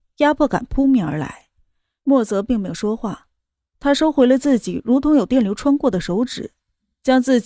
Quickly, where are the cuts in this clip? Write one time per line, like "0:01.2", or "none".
0:02.0